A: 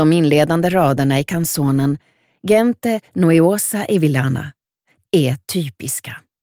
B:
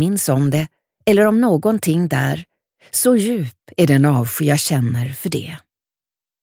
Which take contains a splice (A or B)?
A